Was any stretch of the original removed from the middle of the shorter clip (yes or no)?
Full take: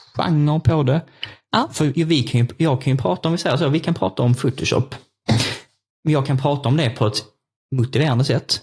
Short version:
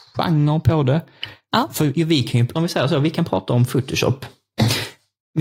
yes